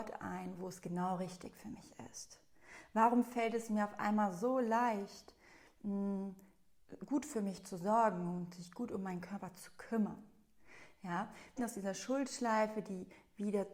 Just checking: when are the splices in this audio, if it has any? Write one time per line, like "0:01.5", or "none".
0:11.6